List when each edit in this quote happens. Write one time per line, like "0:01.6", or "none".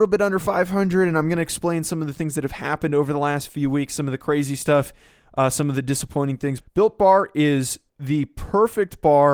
0:06.6
0:07.9